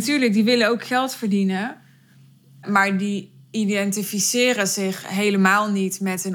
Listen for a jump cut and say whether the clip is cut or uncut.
uncut